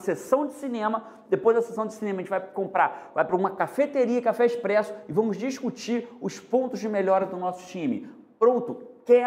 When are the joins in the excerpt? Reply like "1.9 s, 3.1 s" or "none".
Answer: none